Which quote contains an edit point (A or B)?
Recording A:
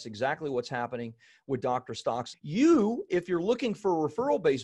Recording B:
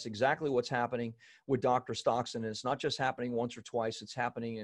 A